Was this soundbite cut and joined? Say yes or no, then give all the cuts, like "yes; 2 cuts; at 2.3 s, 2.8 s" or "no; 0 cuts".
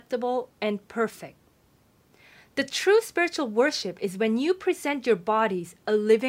no; 0 cuts